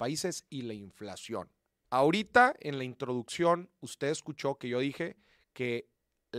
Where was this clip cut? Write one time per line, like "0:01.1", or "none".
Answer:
0:01.8